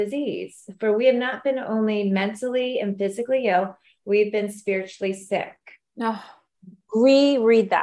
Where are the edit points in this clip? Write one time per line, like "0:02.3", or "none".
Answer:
0:06.9